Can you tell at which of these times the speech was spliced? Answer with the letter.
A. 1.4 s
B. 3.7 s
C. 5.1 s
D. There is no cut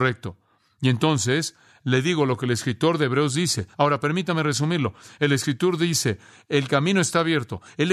B